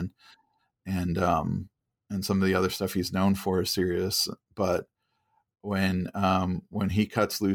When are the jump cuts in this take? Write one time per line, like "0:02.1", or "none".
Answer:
none